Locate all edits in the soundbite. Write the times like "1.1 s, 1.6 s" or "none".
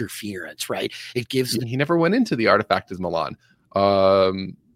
1.6 s